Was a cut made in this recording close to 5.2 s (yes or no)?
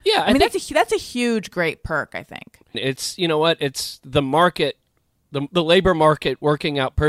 no